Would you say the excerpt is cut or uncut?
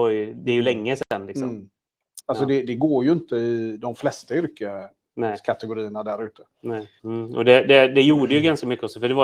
cut